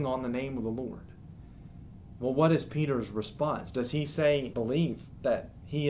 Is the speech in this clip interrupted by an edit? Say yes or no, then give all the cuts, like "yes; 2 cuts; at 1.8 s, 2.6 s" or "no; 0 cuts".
yes; 1 cut; at 4.5 s